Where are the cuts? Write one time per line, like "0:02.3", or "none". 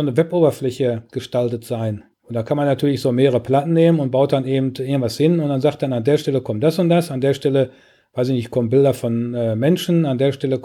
0:02.1